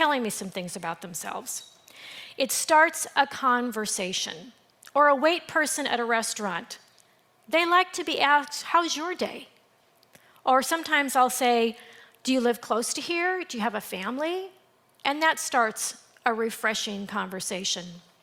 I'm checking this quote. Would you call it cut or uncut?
uncut